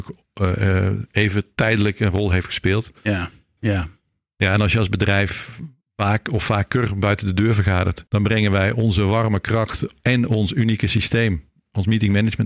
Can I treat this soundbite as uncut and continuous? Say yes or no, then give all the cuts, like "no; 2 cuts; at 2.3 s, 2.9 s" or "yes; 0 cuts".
no; 2 cuts; at 3.6 s, 8.1 s